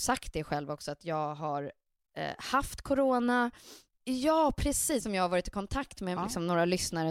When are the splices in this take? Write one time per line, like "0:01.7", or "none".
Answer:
0:03.9
0:05.0
0:06.2